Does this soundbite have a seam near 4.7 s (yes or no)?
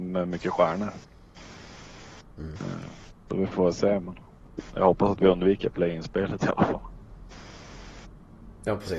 yes